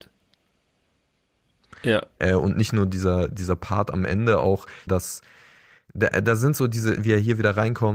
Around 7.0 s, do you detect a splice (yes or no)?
yes